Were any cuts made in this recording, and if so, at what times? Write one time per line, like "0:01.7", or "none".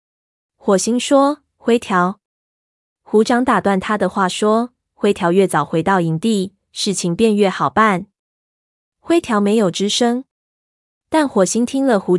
none